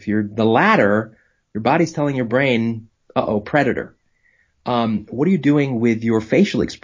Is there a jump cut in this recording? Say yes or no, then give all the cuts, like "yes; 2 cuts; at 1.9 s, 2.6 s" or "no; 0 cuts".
no; 0 cuts